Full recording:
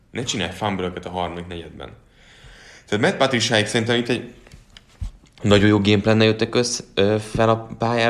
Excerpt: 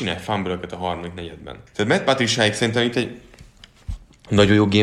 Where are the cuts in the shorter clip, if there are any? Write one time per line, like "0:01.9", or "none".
0:01.7